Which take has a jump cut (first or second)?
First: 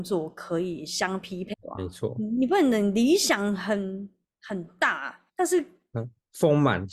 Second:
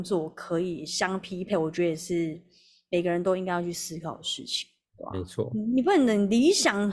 first